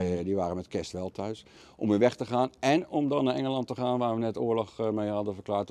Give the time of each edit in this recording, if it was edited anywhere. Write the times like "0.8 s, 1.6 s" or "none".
none